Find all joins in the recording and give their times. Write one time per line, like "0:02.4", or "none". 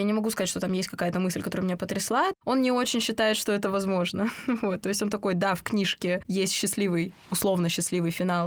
0:02.3

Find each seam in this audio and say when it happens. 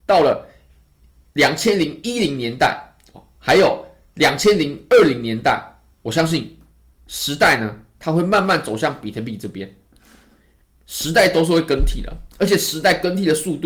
none

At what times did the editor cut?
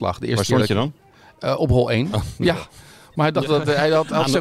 none

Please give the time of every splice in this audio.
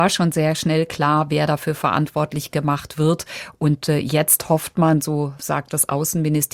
none

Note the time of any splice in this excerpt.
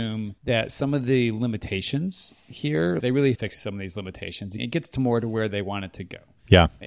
0:03.0

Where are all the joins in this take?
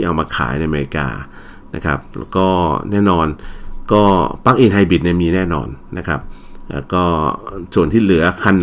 none

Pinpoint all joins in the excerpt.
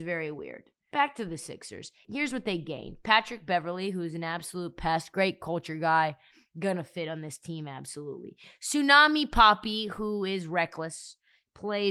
none

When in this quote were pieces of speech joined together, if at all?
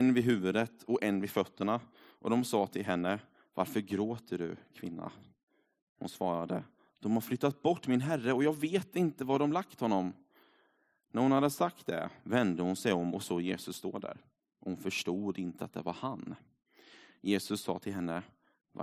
none

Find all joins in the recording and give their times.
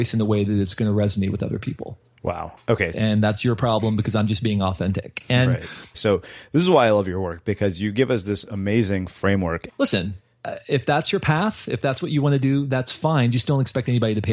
0:02.9
0:05.9
0:09.7

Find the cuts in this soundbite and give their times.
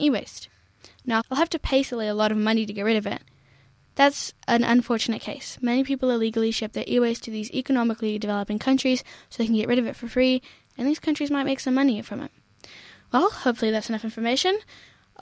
0:01.2
0:03.8

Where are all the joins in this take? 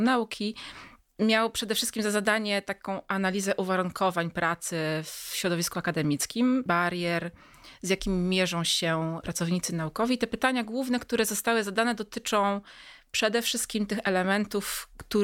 0:06.7

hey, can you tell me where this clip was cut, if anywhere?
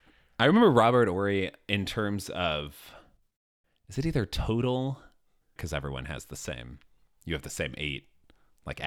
0:05.6

